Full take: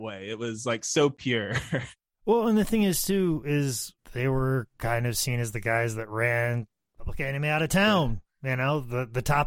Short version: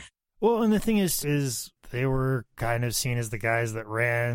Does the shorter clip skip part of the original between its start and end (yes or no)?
yes